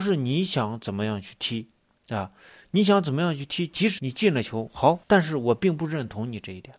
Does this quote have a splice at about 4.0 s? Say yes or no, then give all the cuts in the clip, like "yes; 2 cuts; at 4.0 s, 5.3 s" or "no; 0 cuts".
yes; 2 cuts; at 4.0 s, 5.0 s